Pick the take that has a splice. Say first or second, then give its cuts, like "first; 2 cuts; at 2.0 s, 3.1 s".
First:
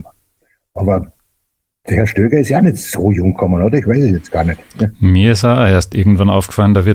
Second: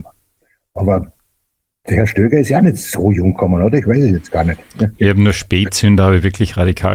second; 1 cut; at 5.0 s